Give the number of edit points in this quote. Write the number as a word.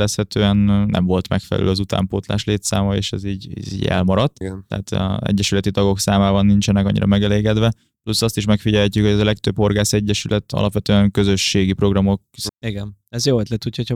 two